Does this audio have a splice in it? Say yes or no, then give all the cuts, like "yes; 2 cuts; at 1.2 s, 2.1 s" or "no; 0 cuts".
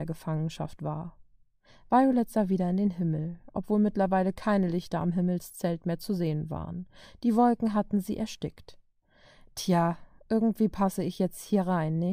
no; 0 cuts